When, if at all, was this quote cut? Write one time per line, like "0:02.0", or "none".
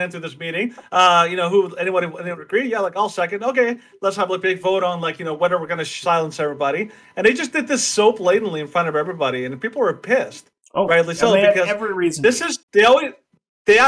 0:12.6